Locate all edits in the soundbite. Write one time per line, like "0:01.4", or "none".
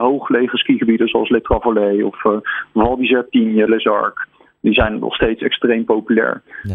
0:03.7